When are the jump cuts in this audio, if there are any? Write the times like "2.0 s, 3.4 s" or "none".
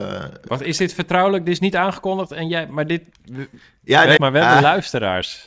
4.2 s